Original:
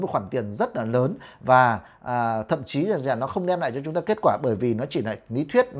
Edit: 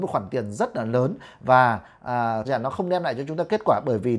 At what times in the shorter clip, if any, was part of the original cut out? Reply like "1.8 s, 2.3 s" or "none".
2.4 s